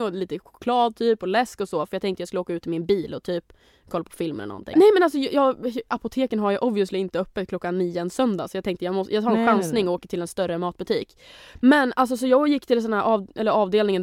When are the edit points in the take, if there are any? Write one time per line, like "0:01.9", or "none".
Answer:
0:04.7